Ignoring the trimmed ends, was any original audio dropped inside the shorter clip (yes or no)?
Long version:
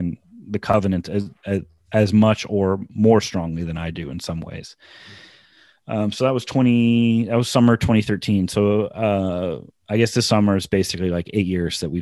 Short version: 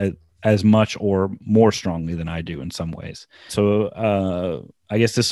yes